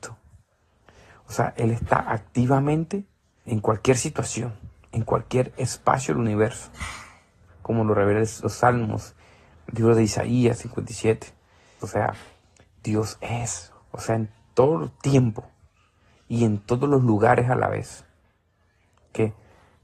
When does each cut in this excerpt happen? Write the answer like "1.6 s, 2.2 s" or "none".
3.5 s, 11.8 s, 13.7 s

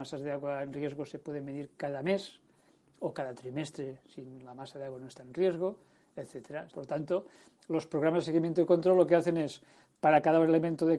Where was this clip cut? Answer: 6.7 s

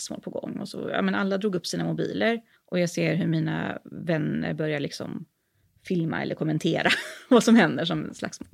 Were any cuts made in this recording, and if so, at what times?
2.5 s

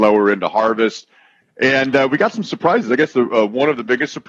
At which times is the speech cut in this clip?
none

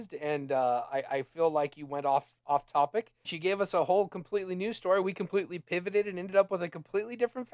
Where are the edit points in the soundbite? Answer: 3.2 s, 5.0 s

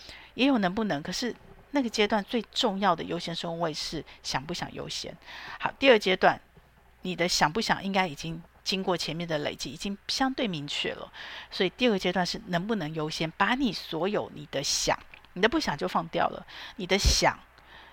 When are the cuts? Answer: none

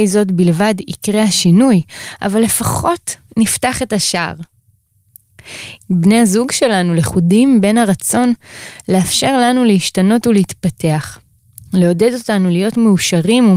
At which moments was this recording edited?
5.8 s

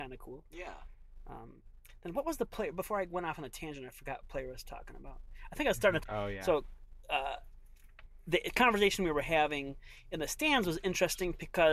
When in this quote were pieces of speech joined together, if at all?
6.0 s

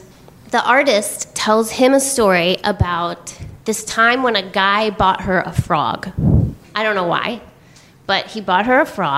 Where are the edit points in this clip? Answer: 3.6 s, 6.6 s

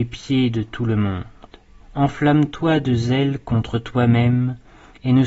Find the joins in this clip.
1.8 s

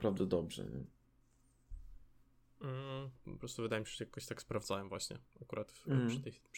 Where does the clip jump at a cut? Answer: 3.1 s

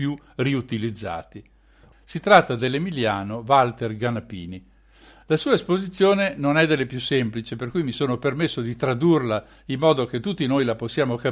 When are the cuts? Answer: 1.9 s

